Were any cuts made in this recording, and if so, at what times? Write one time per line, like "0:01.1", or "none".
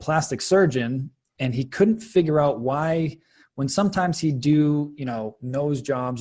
none